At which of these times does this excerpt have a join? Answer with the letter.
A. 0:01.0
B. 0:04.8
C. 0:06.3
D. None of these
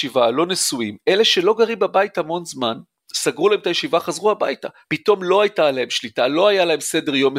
B